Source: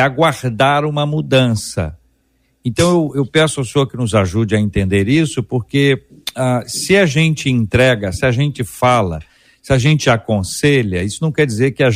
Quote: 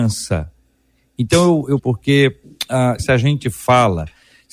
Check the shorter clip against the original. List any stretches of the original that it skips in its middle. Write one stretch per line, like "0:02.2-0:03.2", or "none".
0:03.2-0:05.4
0:06.6-0:08.1